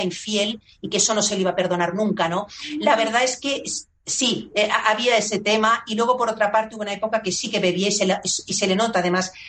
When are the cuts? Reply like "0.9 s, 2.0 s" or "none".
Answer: none